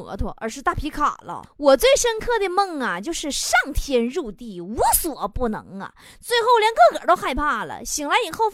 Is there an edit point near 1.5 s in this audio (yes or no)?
yes